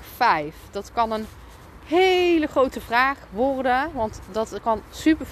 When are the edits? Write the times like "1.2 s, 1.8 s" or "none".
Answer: none

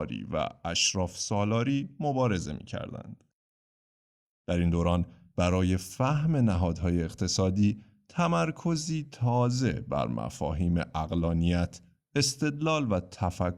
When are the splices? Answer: 4.3 s

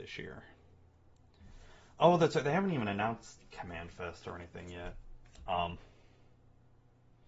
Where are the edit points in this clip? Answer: 5.5 s

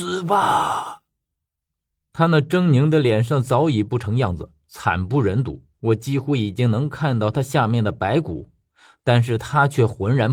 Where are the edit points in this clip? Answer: 5.7 s

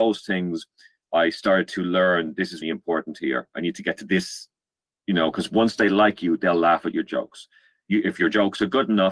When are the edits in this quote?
2.6 s

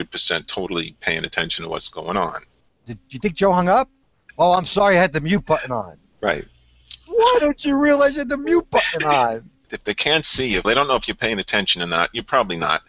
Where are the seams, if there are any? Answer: 2.7 s, 10.6 s

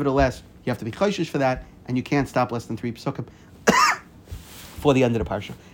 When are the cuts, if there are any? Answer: none

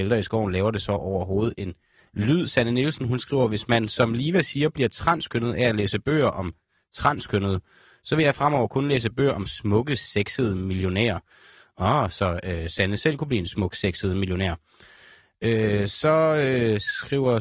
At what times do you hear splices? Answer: none

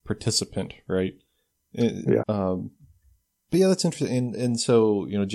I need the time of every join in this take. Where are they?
2.2 s

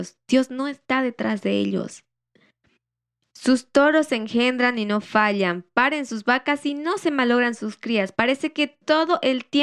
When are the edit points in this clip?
none

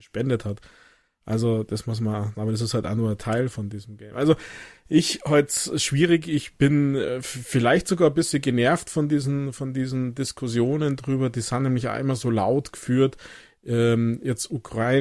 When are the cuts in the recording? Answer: 2.3 s

